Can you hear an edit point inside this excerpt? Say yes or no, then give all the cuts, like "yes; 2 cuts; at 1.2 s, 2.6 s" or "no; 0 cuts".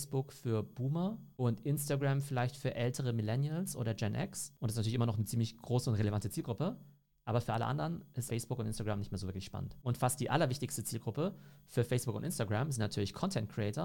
yes; 1 cut; at 8.3 s